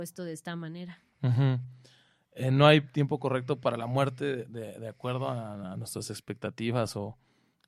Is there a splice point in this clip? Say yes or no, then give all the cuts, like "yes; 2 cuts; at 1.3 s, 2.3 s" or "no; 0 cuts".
no; 0 cuts